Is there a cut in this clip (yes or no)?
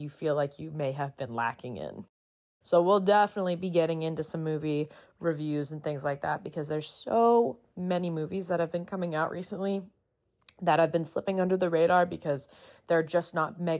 yes